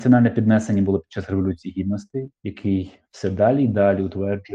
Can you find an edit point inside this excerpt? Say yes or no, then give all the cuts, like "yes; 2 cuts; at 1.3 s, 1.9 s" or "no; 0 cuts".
yes; 1 cut; at 2.3 s